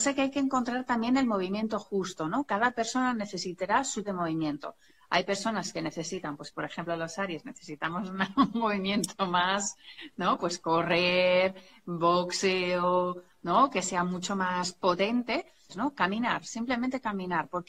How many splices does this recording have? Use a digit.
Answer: 2